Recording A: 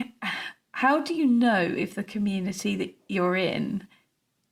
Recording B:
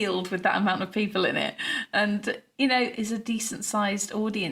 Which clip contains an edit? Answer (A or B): B